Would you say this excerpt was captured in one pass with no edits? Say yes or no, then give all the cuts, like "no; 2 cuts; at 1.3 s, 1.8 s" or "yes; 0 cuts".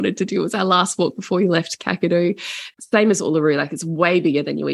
no; 1 cut; at 2.7 s